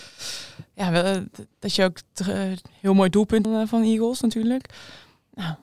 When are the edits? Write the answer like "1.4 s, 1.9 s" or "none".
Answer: 1.5 s, 3.4 s